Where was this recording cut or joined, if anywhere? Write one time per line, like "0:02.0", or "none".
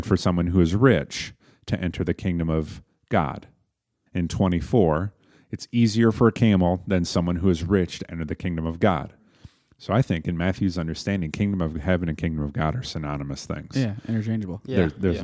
0:04.1